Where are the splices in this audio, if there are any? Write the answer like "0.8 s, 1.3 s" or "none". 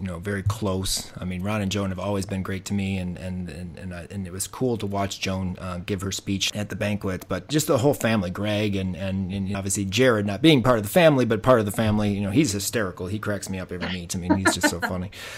9.5 s

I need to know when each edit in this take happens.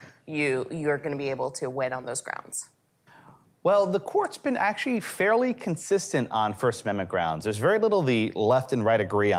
none

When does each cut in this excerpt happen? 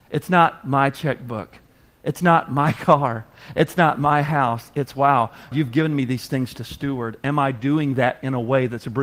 5.5 s

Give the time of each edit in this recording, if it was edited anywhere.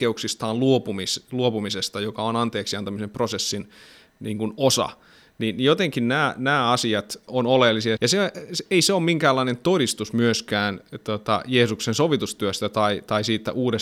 8.0 s

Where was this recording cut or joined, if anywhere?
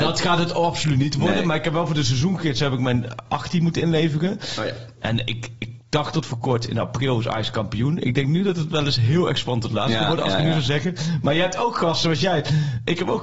5.0 s

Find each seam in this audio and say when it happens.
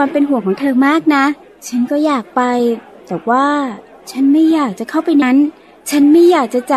5.2 s

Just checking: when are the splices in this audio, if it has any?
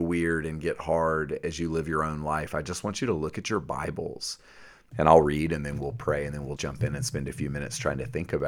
4.9 s, 6.6 s

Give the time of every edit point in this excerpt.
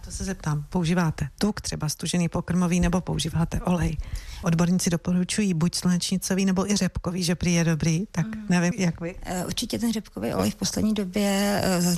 4.4 s, 8.7 s

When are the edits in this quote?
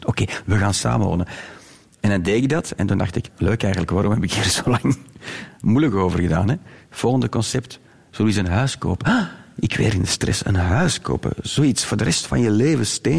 3.3 s

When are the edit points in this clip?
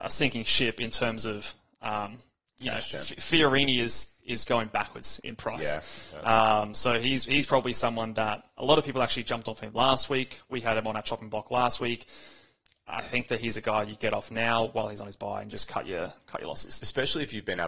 none

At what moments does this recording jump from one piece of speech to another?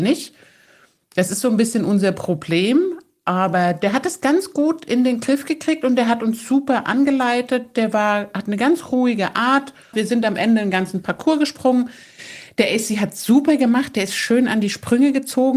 9.9 s

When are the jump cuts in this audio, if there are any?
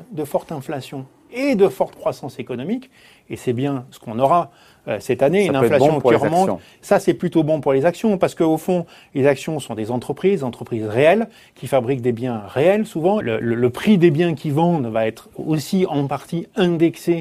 13.2 s

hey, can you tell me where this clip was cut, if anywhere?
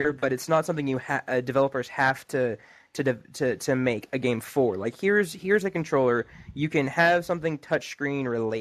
none

